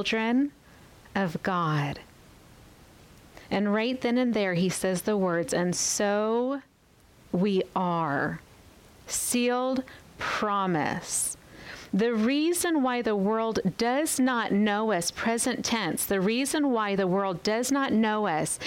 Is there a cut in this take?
no; 0 cuts

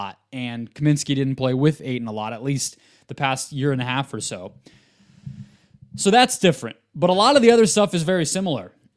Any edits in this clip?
no; 0 cuts

